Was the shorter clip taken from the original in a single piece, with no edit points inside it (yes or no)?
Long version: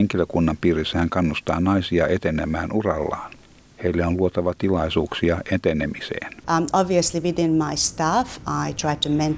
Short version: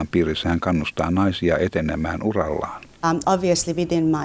no